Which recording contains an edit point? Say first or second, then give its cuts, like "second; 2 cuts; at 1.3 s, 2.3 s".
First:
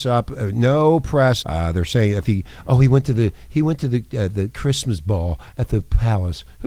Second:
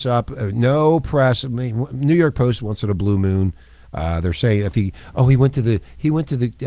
first; 1 cut; at 1.4 s